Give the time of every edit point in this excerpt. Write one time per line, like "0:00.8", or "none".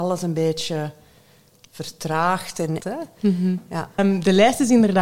0:02.8
0:04.0